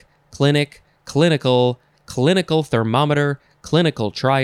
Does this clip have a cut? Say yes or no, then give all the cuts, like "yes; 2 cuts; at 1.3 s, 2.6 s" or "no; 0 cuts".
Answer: no; 0 cuts